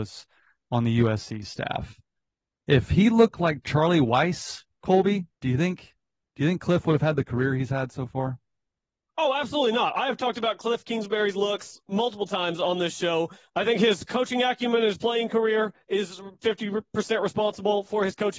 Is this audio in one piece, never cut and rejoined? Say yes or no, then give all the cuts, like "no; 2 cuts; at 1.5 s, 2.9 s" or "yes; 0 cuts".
no; 2 cuts; at 5.3 s, 13.5 s